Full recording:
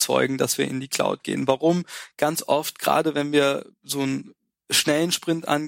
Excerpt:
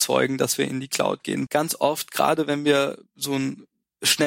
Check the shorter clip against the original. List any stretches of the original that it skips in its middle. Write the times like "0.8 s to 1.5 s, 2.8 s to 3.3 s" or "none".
1.5 s to 2.1 s